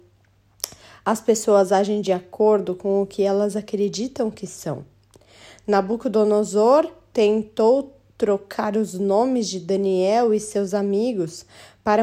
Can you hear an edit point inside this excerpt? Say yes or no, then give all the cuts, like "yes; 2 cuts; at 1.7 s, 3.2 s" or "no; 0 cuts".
no; 0 cuts